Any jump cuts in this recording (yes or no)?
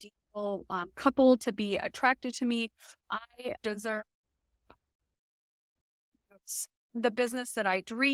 yes